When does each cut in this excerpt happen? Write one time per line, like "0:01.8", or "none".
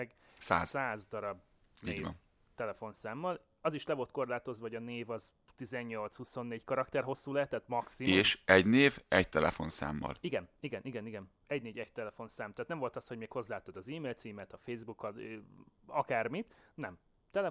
none